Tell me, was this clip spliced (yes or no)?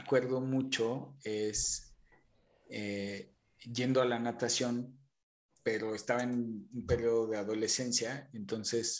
no